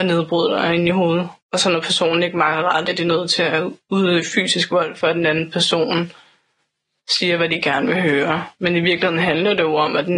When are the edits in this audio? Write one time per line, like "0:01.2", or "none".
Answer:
0:01.4
0:02.9

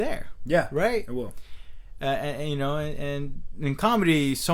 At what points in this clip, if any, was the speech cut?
none

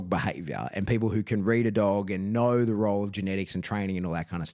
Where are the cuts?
none

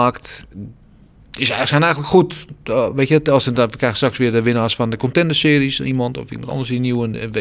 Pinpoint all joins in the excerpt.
none

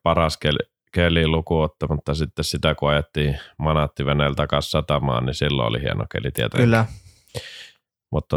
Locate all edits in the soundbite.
none

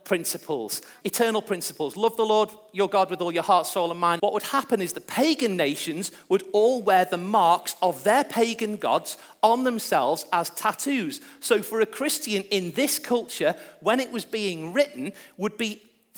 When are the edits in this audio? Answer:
0:01.0
0:04.2

